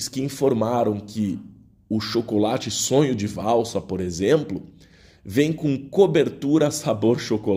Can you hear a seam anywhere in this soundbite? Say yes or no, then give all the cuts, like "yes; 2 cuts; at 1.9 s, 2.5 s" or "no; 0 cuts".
no; 0 cuts